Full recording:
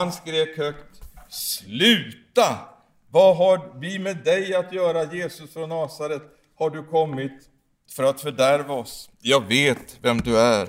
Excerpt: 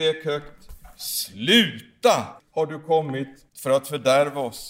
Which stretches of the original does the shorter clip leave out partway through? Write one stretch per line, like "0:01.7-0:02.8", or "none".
0:02.7-0:06.4
0:07.5-0:07.8